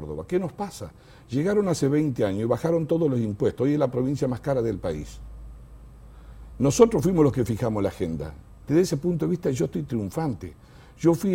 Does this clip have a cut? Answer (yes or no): no